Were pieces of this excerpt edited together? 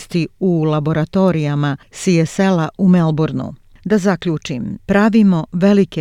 yes; 2 cuts; at 3.7 s, 4.8 s

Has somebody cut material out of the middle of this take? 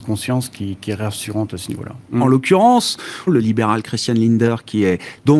yes; 2 cuts; at 2.1 s, 3.3 s

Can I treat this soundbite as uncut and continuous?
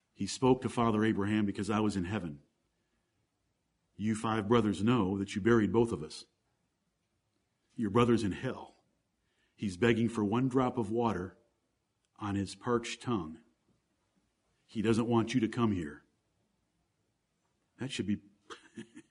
yes; 0 cuts

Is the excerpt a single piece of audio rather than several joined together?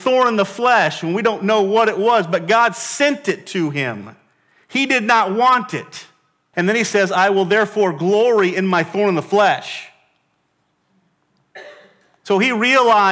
no; 1 cut; at 6.5 s

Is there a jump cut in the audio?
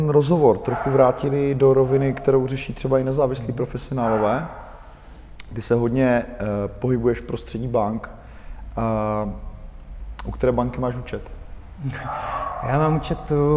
no; 0 cuts

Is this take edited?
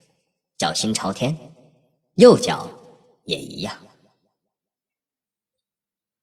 no; 0 cuts

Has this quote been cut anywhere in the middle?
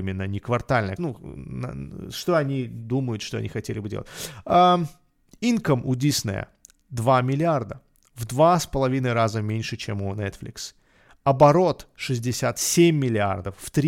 yes; 1 cut; at 1.0 s

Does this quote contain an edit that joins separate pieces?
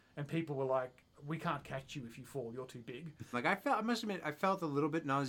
yes; 2 cuts; at 1.1 s, 3.3 s

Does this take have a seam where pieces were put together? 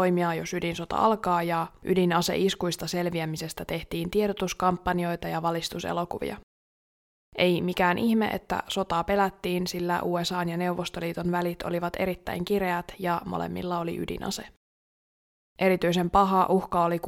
yes; 1 cut; at 7.2 s

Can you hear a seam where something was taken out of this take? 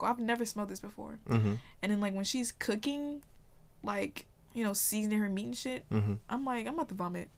no; 0 cuts

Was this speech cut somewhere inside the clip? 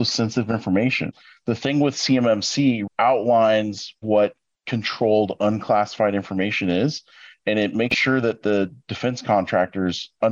yes; 1 cut; at 2.9 s

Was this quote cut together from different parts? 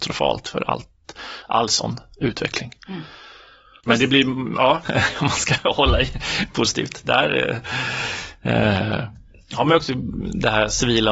yes; 1 cut; at 4.9 s

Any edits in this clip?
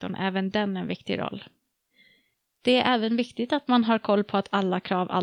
no; 0 cuts

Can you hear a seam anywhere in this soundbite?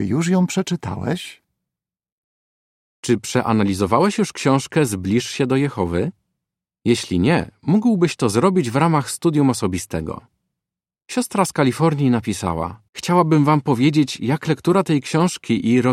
yes; 1 cut; at 12.9 s

